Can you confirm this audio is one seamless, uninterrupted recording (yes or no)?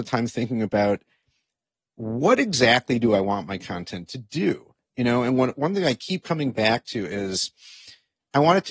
yes